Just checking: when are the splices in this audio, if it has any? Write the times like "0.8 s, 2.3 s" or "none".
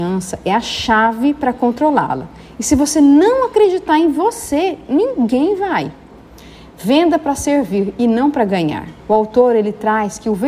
9.0 s